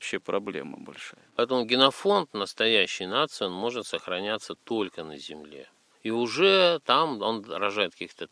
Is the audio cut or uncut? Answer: uncut